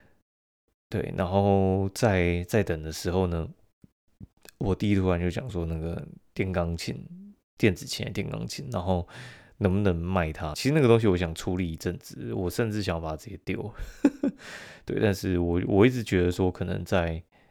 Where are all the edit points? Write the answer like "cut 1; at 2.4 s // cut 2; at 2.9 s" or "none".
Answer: cut 1; at 10.5 s